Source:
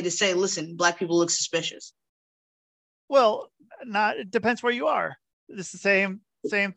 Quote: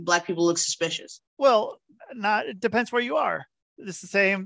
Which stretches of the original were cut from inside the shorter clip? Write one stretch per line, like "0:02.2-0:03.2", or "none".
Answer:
0:02.0-0:03.0

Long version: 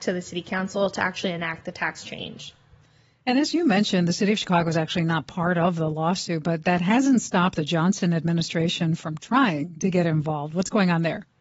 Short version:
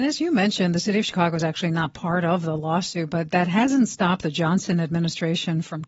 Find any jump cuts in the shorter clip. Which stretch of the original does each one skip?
none

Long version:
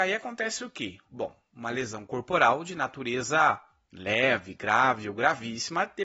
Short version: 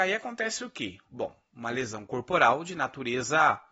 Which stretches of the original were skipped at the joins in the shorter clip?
none

